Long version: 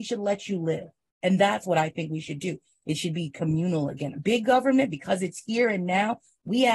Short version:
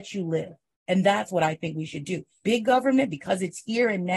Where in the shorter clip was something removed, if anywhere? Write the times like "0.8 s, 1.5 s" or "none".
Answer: 2.4 s